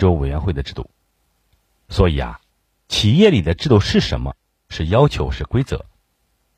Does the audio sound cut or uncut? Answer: uncut